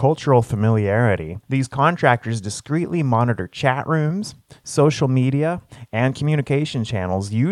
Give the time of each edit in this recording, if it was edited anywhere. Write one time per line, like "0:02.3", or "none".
0:01.4